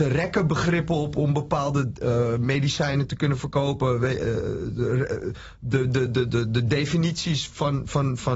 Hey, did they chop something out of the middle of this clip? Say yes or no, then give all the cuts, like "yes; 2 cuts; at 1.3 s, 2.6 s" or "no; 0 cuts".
no; 0 cuts